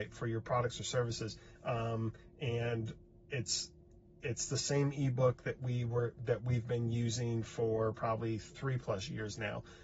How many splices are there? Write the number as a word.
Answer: one